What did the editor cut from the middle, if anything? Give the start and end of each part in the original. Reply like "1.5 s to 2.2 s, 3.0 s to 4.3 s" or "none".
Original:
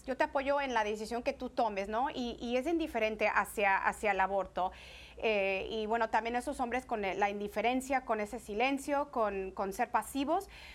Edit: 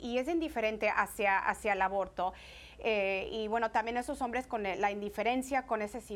none